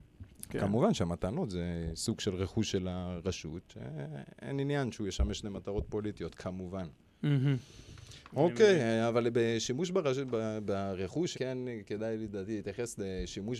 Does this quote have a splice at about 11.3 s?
yes; 1 cut; at 11.3 s

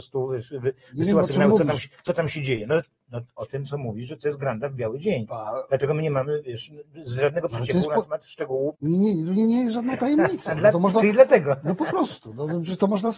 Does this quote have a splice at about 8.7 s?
yes; 1 cut; at 8.7 s

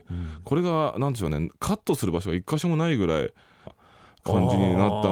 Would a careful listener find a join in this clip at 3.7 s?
yes; 1 cut; at 3.7 s

